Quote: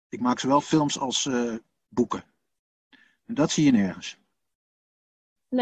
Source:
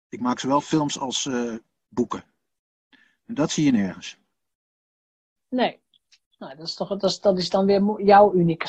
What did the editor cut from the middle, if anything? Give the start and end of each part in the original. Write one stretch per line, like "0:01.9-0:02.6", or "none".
none